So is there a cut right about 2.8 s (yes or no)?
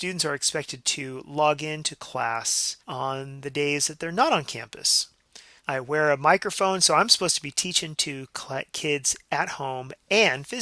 yes